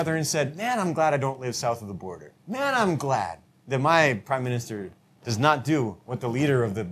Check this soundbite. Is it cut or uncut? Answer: cut